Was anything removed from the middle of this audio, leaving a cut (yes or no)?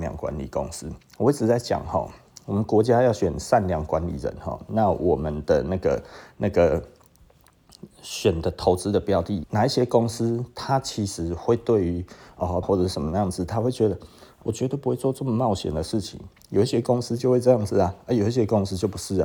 yes